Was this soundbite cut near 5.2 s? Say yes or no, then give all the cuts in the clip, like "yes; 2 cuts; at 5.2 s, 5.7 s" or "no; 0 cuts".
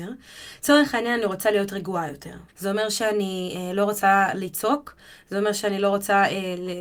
no; 1 cut; at 2.5 s